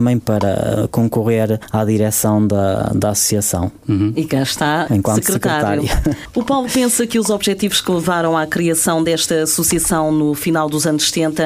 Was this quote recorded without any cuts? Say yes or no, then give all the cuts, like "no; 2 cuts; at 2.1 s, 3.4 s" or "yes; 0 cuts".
no; 1 cut; at 4.9 s